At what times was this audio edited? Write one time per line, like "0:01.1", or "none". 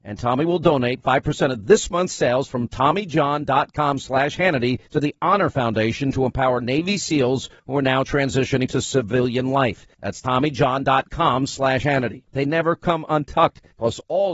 0:12.3